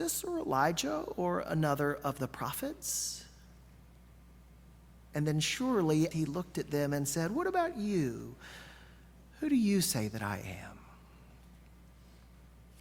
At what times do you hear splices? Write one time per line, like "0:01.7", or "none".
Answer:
0:06.1